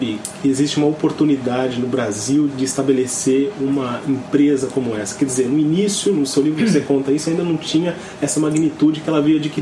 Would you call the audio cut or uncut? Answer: cut